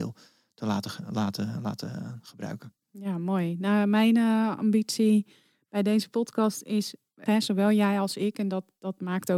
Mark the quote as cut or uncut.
cut